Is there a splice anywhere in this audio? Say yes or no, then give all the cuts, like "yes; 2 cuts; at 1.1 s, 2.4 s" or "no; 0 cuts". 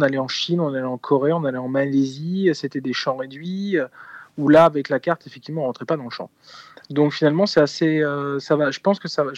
yes; 1 cut; at 6.8 s